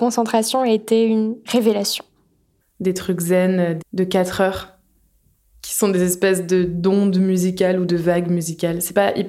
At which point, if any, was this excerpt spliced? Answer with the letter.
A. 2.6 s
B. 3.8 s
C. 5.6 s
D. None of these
B